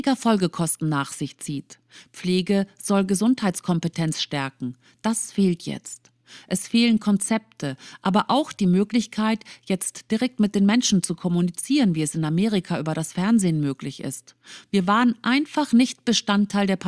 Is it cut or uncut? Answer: uncut